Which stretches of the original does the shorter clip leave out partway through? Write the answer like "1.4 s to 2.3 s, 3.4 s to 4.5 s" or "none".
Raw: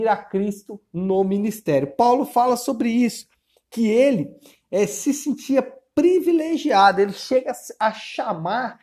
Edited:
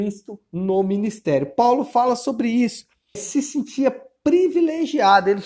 3.6 s to 4.9 s